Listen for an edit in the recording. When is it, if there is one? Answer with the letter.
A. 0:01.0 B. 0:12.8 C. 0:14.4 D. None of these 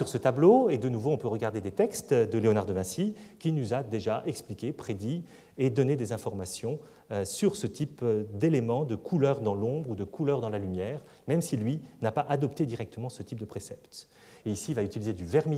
C